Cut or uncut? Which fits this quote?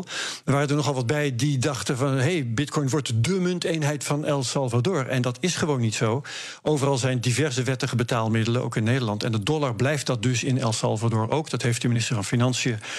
uncut